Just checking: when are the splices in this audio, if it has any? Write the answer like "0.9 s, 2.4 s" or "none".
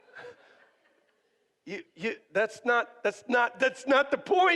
none